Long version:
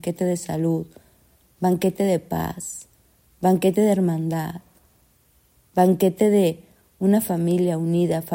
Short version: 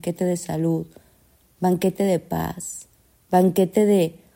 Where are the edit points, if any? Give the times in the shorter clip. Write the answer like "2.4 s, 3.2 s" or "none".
3.1 s